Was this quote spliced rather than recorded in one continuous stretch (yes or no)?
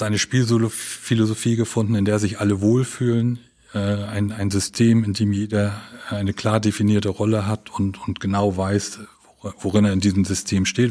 no